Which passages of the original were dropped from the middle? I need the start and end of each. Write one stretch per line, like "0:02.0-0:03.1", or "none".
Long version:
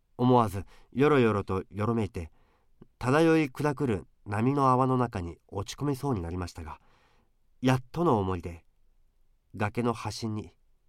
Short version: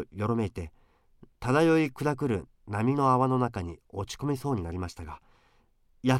none